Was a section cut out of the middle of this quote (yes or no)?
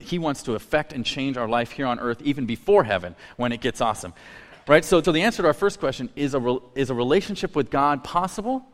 yes